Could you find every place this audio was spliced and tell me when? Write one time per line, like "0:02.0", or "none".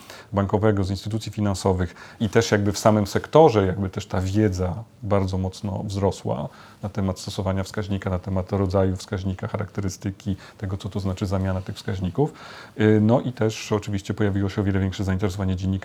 0:02.2